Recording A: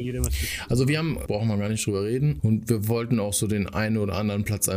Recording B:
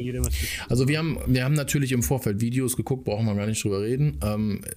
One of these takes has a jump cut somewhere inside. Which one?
A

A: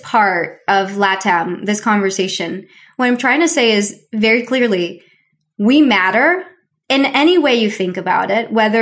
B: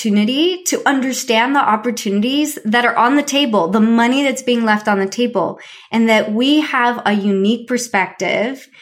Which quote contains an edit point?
A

